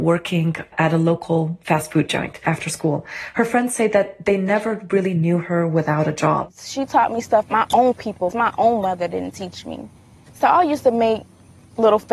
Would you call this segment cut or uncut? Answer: cut